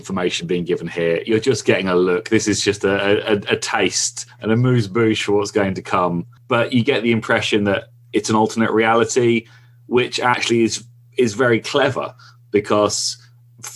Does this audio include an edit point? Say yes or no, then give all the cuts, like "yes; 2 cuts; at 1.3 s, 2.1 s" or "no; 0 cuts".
no; 0 cuts